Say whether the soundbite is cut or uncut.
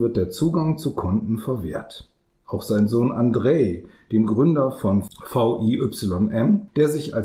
uncut